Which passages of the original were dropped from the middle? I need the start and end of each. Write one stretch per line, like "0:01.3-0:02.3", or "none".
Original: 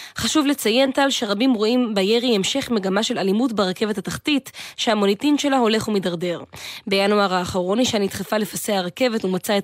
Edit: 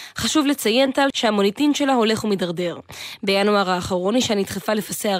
0:01.1-0:04.7